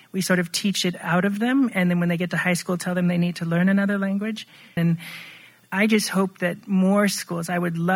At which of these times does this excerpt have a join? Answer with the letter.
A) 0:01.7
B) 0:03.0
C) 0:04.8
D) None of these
C